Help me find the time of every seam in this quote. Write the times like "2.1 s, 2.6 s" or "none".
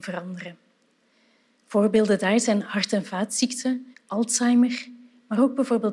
3.9 s